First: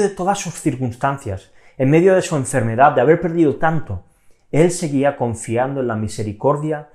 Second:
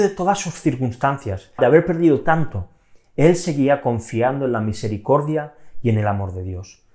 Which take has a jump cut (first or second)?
second